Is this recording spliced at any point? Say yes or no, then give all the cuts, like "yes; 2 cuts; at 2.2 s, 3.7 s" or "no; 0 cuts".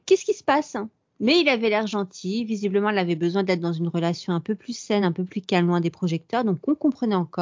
no; 0 cuts